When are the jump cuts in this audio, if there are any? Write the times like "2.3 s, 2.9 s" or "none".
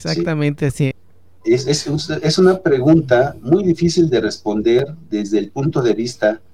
0.9 s

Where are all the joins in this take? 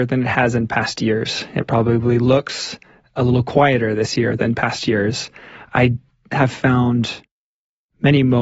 none

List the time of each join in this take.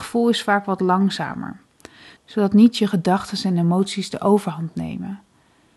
2.2 s

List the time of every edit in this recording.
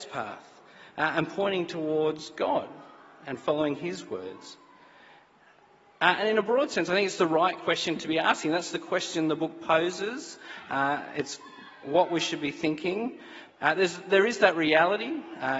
13.5 s

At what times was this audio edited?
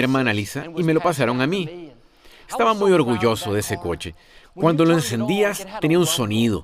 none

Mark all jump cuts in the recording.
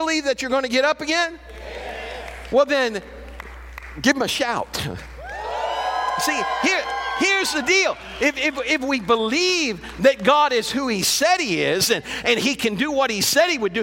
none

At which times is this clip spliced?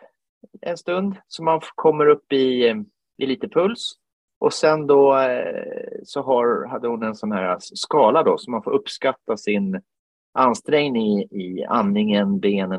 none

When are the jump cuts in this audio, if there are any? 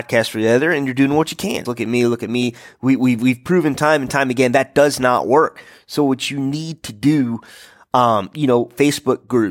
1.6 s

